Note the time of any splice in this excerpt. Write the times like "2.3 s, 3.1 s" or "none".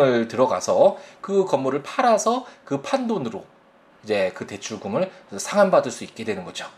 none